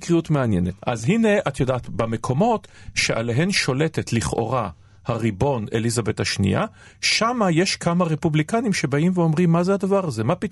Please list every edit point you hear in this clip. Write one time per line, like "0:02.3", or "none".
none